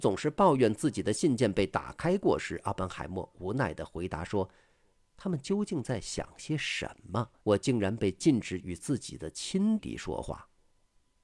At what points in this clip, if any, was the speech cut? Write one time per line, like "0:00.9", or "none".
0:07.4
0:09.8